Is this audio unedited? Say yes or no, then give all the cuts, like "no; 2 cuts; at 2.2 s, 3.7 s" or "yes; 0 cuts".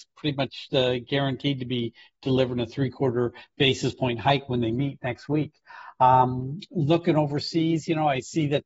yes; 0 cuts